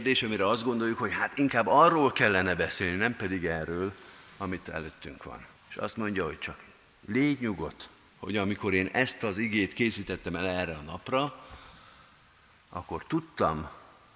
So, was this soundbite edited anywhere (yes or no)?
yes